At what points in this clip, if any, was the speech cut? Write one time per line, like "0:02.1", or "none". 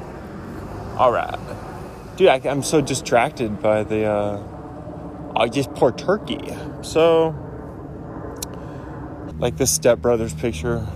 0:06.8
0:09.3